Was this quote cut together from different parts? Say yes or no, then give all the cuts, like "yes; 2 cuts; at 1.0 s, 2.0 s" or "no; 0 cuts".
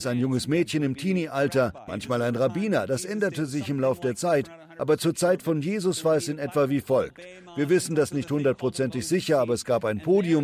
yes; 1 cut; at 1.9 s